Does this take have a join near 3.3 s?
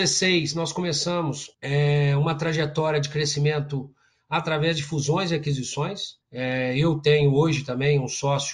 no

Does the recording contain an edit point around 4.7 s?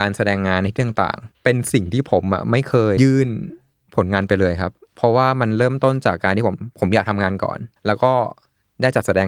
no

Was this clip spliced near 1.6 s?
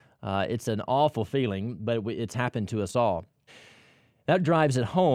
no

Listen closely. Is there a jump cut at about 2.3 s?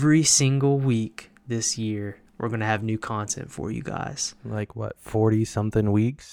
yes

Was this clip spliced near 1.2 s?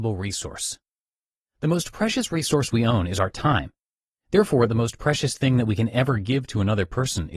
no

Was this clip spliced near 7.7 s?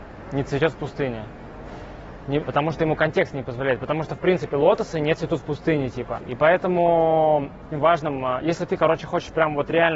yes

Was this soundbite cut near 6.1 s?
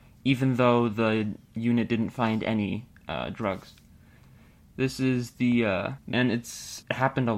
yes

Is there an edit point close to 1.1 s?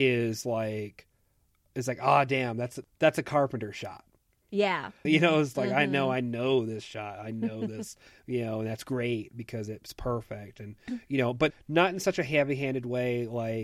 no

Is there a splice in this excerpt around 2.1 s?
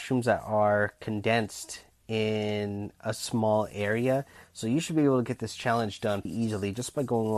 no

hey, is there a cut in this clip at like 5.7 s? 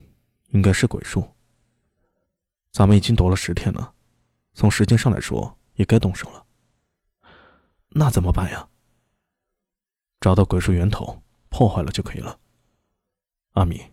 yes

